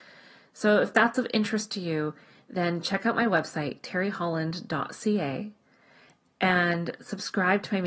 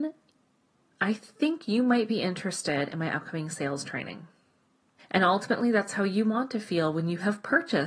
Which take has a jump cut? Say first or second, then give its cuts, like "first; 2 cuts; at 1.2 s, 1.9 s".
second; 1 cut; at 5.0 s